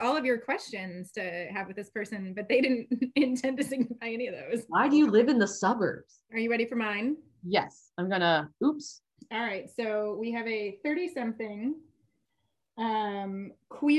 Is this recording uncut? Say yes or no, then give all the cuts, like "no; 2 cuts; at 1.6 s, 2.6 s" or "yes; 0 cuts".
no; 2 cuts; at 6.3 s, 9.2 s